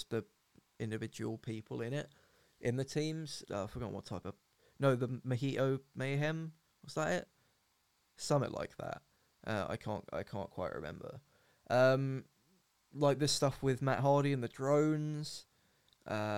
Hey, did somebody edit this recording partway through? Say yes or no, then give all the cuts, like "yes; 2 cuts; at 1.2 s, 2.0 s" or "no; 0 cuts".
yes; 1 cut; at 3.4 s